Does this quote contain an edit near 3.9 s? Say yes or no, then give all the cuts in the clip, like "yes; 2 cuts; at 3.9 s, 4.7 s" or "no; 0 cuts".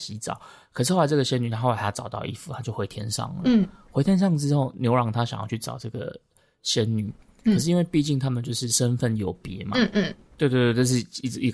no; 1 cut; at 10.3 s